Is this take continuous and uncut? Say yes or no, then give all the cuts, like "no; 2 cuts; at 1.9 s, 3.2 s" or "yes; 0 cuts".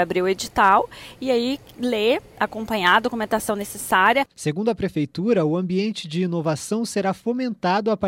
no; 1 cut; at 4.3 s